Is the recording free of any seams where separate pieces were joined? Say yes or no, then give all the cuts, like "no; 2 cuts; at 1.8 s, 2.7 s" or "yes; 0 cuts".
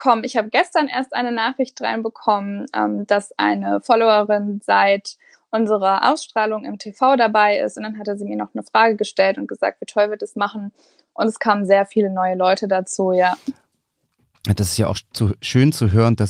yes; 0 cuts